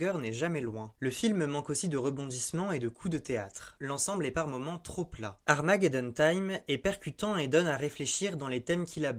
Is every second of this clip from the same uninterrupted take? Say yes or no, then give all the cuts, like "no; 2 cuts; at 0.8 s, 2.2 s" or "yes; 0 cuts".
yes; 0 cuts